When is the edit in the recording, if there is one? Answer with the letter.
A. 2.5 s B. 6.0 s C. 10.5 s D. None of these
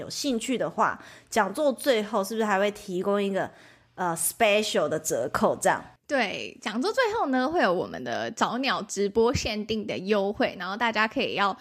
B